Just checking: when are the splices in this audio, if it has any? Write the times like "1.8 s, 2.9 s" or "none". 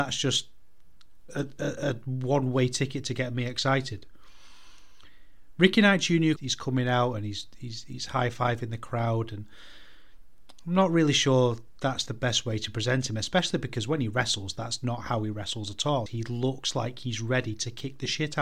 6.4 s, 16.1 s